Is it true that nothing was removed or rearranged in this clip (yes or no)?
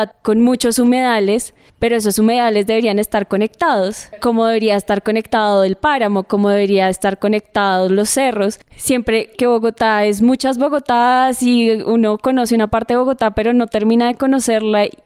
no